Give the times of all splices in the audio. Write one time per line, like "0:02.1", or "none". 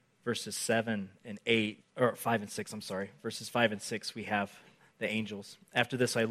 0:01.8